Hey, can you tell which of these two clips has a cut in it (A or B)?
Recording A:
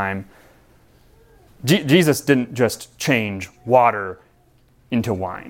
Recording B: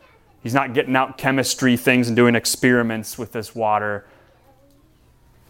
A